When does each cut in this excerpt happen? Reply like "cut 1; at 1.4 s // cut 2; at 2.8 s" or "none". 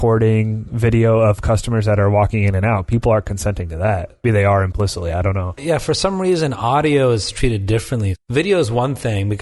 cut 1; at 4.2 s // cut 2; at 5.6 s

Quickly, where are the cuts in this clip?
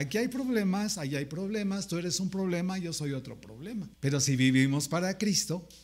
cut 1; at 3.9 s

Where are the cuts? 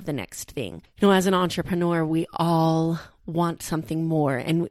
none

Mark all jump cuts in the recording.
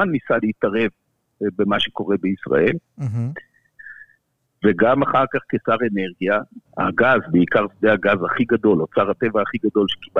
cut 1; at 6.7 s

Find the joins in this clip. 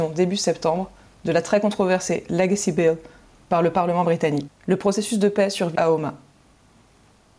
cut 1; at 4.5 s // cut 2; at 5.7 s

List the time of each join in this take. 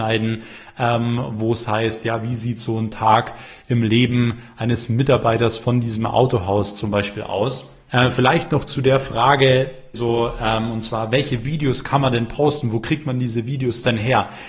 cut 1; at 7.9 s // cut 2; at 9.9 s

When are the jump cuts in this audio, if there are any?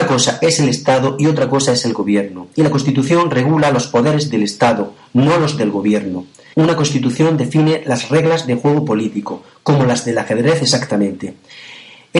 cut 1; at 6.5 s

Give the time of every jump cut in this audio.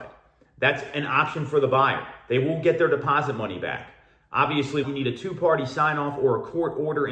cut 1; at 4.8 s

